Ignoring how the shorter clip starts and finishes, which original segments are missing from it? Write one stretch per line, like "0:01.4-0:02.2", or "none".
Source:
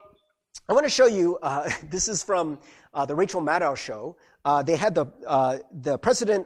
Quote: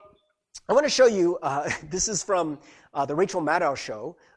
none